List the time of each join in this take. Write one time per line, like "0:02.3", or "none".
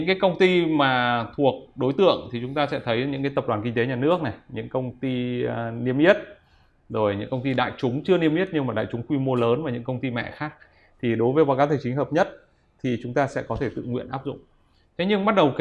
none

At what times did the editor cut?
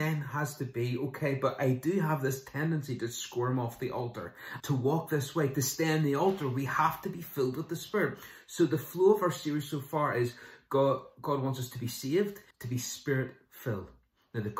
0:04.6
0:12.5

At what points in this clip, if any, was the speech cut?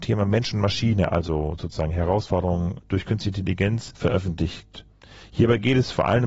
none

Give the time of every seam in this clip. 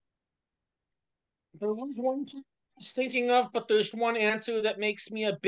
0:03.9

